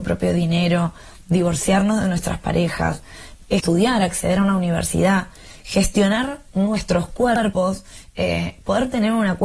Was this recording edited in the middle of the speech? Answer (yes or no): no